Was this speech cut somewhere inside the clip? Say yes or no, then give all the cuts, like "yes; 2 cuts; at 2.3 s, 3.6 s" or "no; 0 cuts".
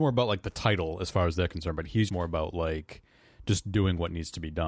yes; 1 cut; at 2.1 s